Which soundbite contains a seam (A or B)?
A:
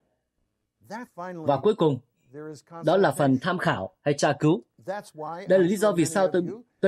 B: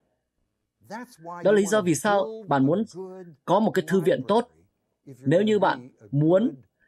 A